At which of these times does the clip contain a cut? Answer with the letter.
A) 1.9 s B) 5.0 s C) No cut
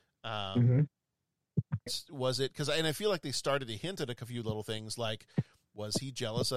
A